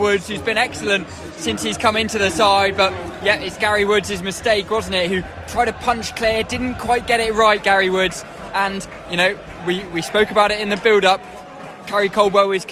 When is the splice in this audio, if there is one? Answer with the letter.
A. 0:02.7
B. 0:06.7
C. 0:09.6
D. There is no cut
D